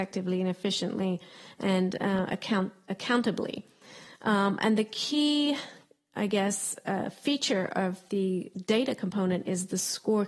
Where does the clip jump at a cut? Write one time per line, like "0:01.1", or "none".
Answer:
none

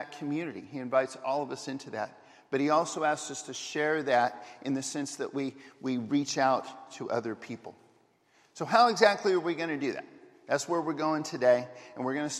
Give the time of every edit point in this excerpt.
none

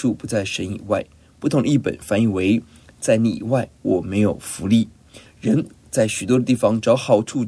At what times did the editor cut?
0:05.3

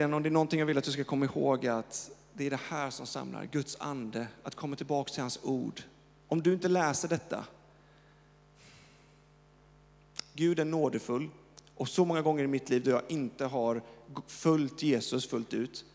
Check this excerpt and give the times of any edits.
none

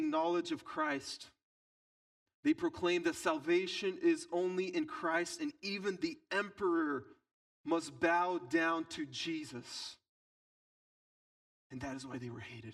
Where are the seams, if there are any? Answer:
none

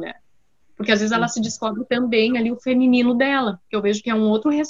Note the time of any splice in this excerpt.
none

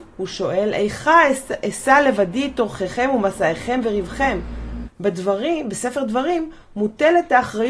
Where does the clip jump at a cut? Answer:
0:04.8

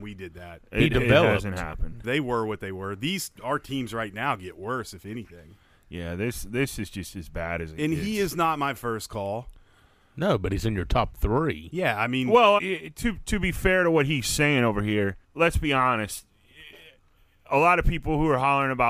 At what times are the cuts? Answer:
0:02.0
0:12.6
0:15.2

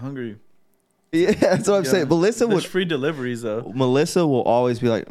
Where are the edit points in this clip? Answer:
0:01.1

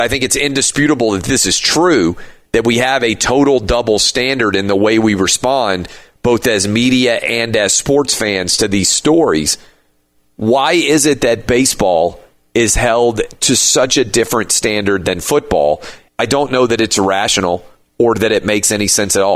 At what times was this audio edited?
0:16.1

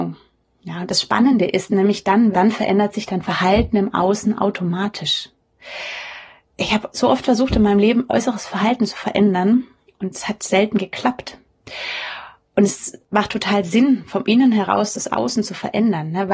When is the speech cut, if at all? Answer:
0:02.3

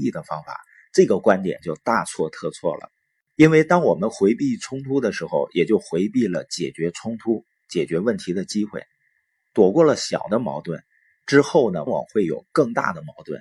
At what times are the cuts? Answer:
0:11.9

